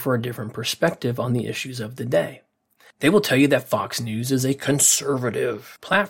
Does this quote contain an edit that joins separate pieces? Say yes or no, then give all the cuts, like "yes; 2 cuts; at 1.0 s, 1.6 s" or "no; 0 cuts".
no; 0 cuts